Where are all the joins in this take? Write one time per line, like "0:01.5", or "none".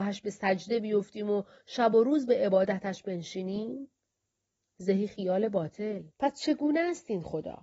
0:06.1